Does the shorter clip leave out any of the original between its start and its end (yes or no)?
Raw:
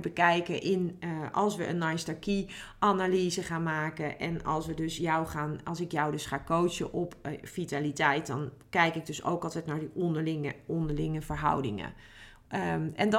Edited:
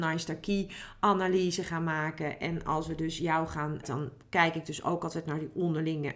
yes